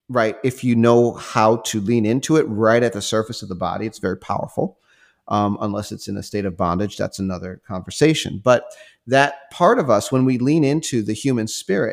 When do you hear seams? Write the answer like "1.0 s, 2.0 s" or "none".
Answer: none